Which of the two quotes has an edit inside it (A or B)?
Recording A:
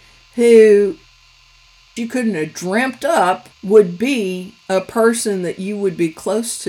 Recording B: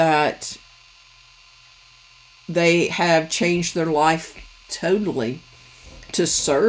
A